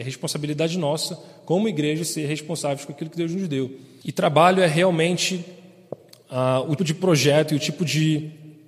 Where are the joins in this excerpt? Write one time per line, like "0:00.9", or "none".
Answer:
0:04.0
0:06.8

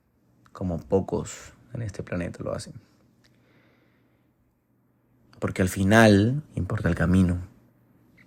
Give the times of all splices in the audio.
0:05.3
0:06.5

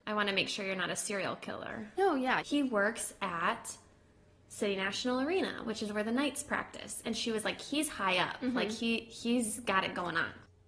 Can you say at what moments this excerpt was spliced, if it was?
0:02.4

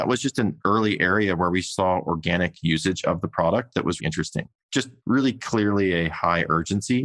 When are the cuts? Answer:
0:04.0

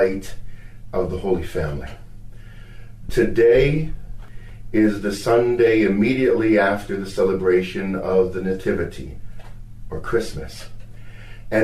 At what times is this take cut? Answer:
0:03.1

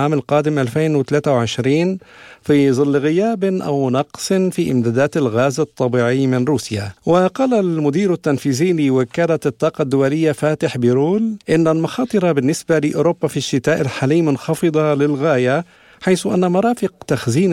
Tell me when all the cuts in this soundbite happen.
0:07.0
0:11.4

